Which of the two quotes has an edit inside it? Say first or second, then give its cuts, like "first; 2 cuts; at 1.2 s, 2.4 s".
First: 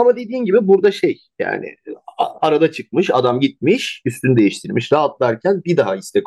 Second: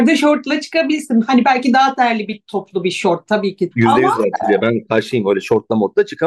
second; 1 cut; at 3.7 s